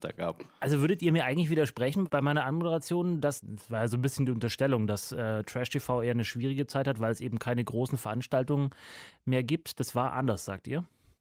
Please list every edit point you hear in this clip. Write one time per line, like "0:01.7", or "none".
none